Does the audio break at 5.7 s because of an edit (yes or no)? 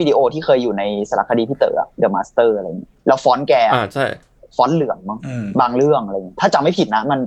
no